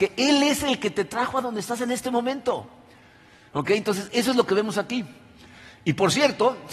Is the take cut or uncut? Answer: uncut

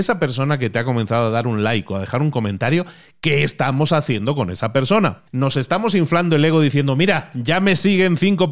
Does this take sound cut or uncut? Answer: uncut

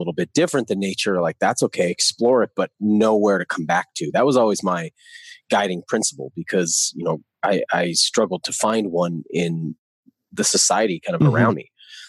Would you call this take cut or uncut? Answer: uncut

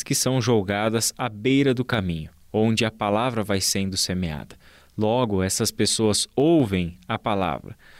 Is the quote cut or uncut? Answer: uncut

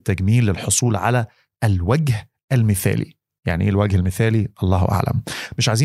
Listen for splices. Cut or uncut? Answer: uncut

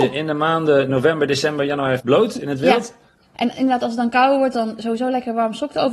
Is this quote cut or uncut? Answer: cut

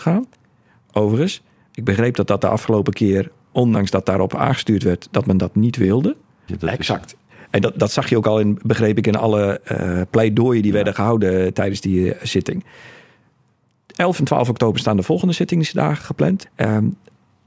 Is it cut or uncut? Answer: cut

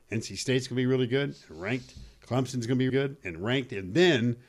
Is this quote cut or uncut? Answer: cut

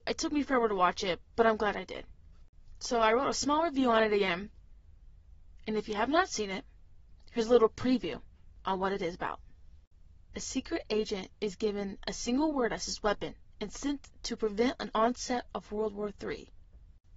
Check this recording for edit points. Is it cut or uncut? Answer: uncut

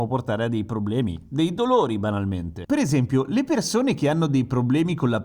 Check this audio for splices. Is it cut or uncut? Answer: cut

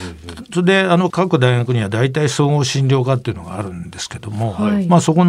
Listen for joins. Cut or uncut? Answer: cut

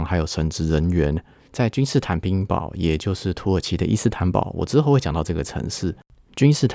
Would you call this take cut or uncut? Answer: cut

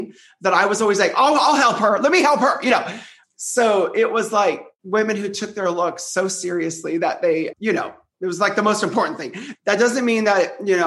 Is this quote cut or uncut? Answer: cut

